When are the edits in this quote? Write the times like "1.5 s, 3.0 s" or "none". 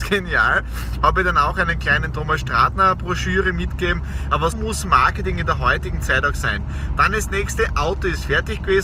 4.5 s